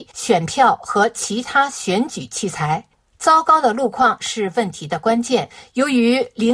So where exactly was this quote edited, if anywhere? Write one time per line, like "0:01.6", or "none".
none